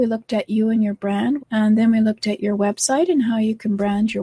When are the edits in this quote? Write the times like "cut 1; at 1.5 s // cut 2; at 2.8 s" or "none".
cut 1; at 1.4 s